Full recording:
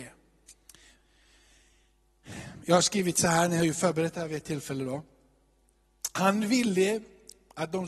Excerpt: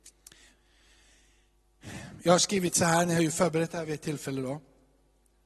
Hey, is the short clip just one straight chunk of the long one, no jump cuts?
yes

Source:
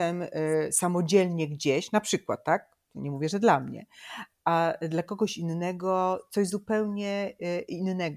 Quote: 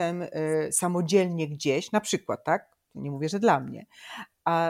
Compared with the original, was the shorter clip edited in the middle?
no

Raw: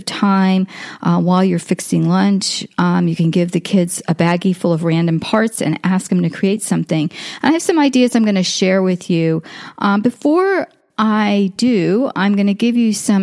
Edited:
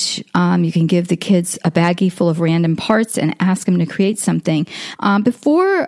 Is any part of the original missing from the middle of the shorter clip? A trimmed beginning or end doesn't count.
yes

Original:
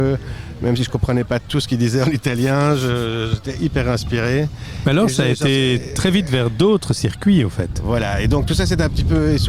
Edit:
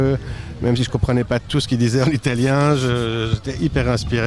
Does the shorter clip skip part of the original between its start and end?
no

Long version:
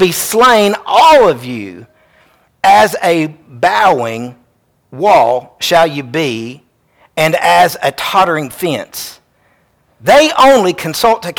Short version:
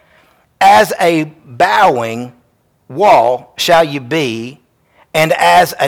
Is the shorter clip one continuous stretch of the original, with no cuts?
yes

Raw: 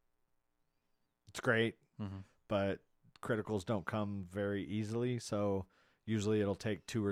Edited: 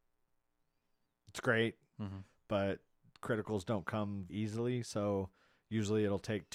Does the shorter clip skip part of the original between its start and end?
yes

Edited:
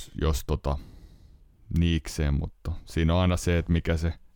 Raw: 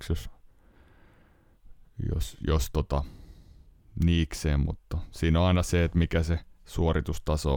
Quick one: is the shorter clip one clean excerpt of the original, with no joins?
yes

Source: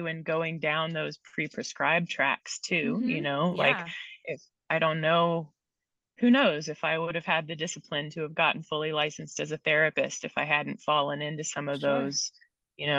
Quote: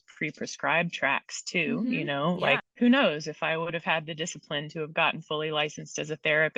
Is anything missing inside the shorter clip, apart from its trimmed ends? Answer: yes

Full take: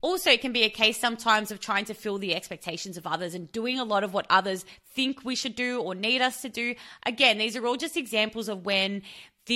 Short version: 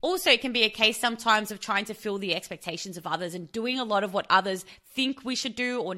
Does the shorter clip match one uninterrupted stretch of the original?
yes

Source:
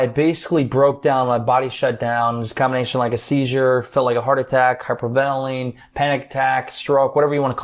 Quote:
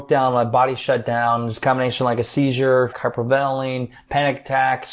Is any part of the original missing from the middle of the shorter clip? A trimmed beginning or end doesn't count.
yes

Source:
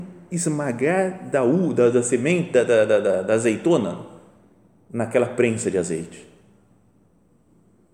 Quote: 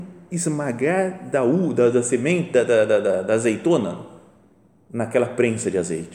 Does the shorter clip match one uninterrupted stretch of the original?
yes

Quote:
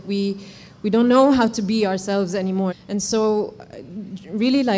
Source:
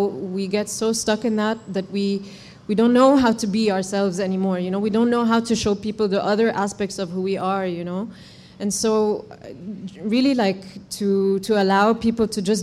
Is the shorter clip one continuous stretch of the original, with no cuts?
no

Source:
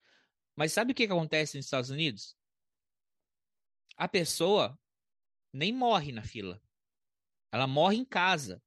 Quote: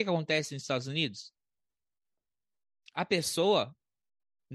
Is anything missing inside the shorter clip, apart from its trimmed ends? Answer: no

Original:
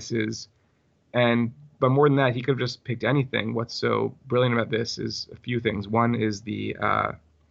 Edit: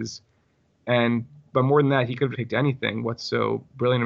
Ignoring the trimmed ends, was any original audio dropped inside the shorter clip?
yes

